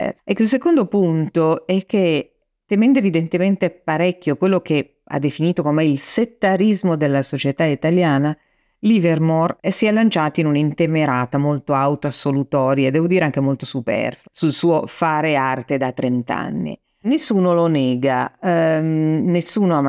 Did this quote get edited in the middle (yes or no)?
no